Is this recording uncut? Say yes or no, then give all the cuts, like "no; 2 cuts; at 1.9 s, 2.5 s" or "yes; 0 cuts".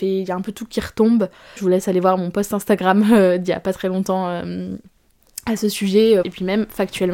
no; 2 cuts; at 1.6 s, 6.2 s